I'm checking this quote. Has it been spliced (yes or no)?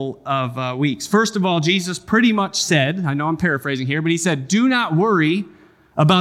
no